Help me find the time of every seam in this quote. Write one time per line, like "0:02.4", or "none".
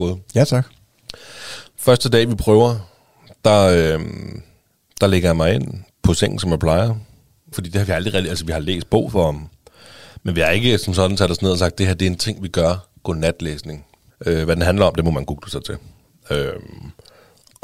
0:07.5
0:14.1